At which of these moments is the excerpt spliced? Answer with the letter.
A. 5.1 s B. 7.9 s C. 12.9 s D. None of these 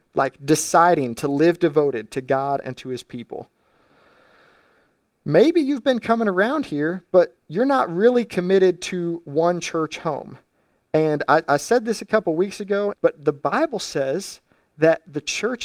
C